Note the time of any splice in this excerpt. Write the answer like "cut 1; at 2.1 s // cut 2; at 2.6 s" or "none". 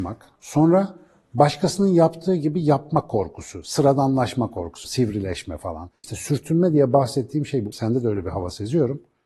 cut 1; at 4.8 s // cut 2; at 6.0 s // cut 3; at 7.7 s